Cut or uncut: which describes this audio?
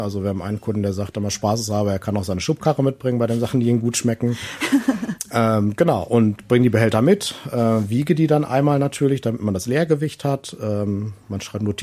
uncut